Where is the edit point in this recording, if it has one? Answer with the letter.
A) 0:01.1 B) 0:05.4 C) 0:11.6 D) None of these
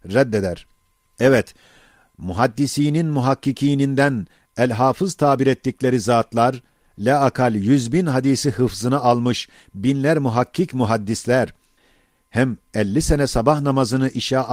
A